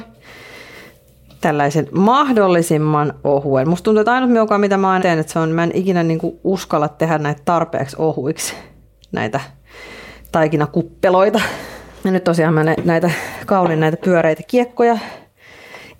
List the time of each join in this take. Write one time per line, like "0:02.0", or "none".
0:05.0
0:12.0

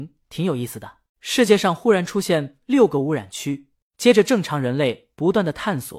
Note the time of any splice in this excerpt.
0:01.1
0:03.8

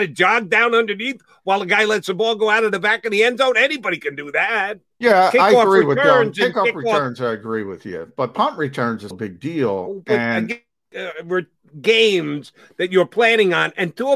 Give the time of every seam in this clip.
0:05.0
0:09.1
0:10.9

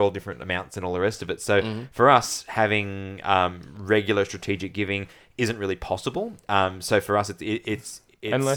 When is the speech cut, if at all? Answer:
none

